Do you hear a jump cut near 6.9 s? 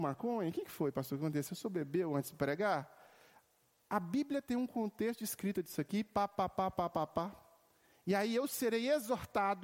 yes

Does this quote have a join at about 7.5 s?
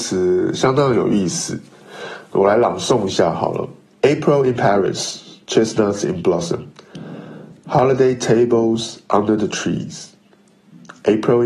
no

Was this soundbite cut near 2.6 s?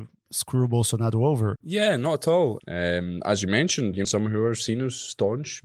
yes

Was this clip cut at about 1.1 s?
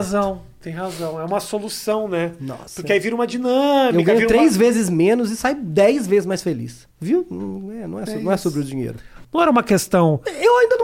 no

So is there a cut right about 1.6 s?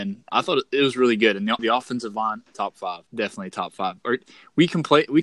yes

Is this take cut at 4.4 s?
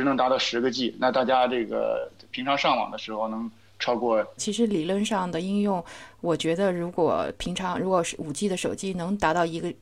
yes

